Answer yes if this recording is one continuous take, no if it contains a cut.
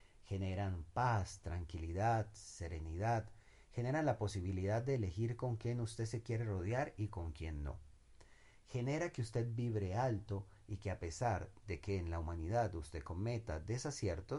yes